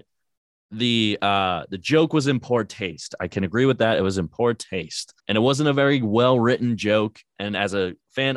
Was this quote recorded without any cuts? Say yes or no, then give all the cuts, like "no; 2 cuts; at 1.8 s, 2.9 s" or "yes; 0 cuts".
no; 1 cut; at 5.2 s